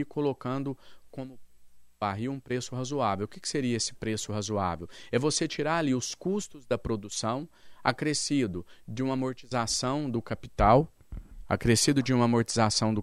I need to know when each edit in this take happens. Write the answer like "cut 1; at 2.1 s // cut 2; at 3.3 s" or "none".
none